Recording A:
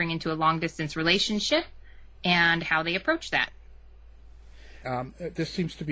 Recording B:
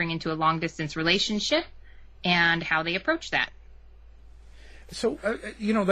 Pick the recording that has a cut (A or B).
A